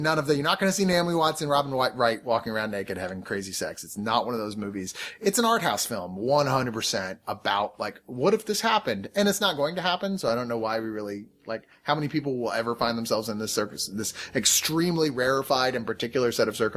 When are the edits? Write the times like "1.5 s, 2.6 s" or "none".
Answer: none